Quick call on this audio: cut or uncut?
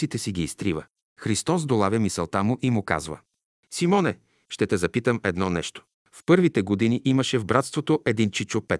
cut